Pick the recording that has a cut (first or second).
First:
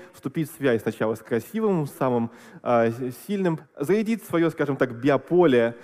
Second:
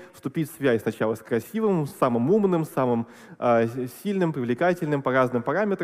first